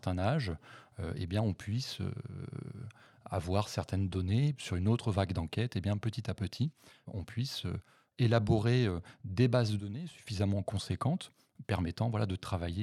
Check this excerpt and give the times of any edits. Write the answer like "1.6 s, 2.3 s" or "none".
4.6 s